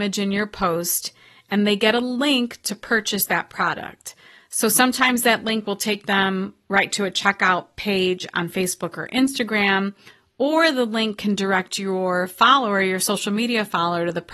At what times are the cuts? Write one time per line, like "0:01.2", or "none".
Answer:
none